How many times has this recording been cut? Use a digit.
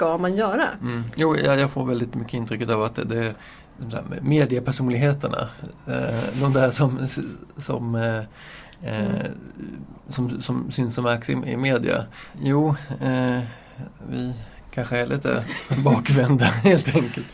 2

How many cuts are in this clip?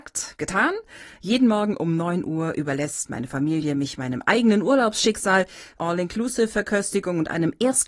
1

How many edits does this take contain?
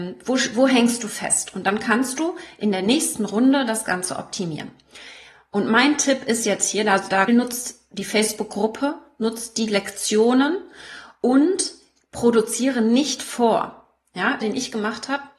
2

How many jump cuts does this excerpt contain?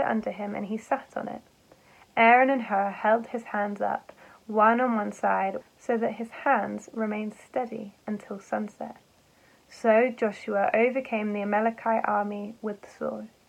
1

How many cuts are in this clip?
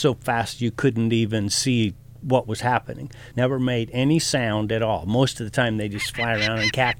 1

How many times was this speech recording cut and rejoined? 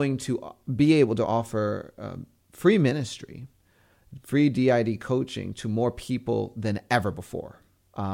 0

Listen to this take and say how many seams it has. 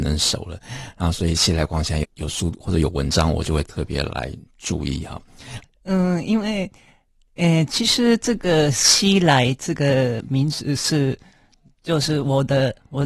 2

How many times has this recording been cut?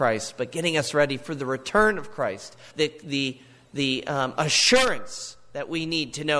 1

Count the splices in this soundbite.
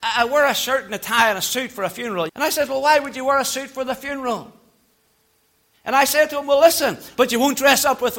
3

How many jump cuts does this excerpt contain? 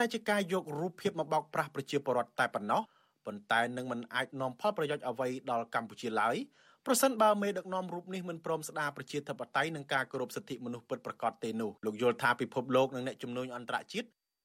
1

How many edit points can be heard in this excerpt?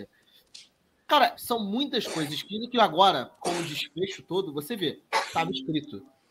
1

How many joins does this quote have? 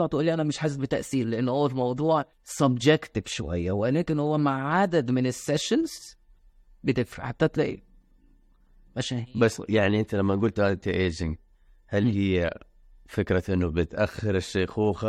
1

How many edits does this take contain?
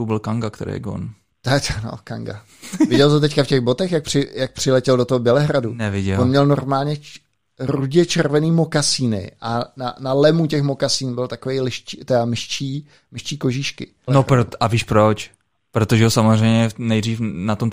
1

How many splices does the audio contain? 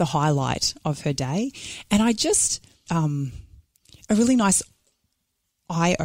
1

